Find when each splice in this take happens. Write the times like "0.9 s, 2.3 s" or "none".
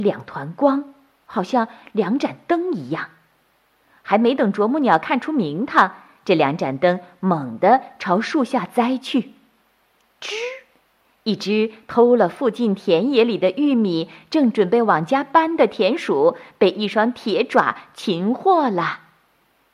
none